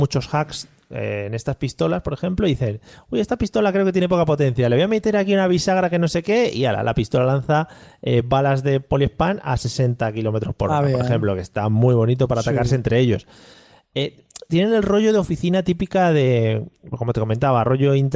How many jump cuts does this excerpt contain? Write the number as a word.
zero